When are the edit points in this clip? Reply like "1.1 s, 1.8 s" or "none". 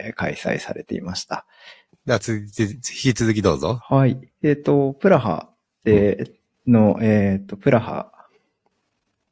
1.9 s, 4.3 s